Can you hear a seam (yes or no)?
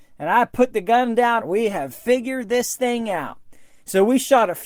yes